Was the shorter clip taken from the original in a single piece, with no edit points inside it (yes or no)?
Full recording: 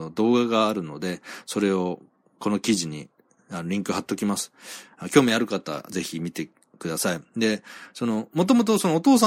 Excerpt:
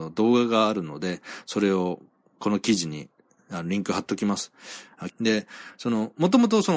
no